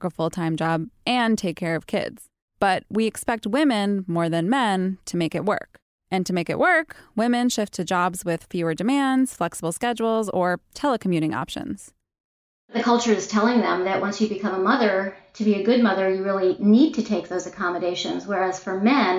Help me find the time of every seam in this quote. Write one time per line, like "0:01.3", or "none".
none

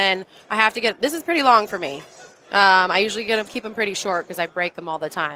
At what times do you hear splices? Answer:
none

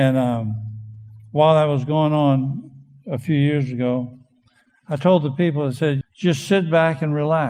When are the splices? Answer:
0:04.7
0:06.0

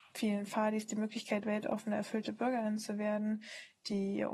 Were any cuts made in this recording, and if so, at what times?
none

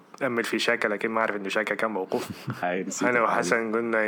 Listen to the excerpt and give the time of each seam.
0:02.6

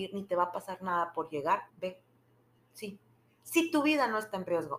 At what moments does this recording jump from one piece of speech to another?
0:01.7

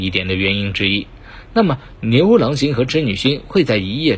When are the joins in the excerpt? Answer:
none

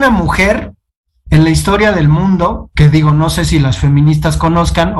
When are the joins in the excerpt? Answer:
none

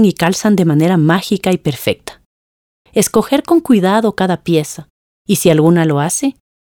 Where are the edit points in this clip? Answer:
0:02.9
0:05.1

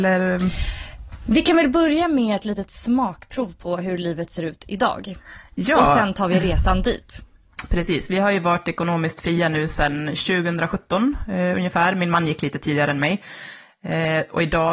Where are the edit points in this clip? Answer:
none

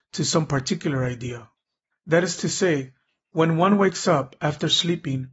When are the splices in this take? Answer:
0:01.9

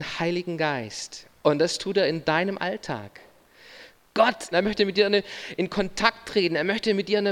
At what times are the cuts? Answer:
0:04.5

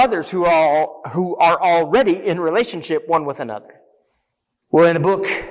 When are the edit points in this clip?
0:04.6

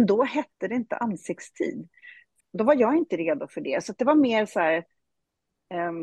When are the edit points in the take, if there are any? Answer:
0:02.4

